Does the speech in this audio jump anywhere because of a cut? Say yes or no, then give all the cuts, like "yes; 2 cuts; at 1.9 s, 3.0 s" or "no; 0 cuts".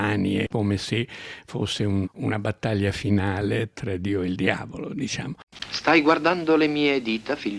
yes; 1 cut; at 2.0 s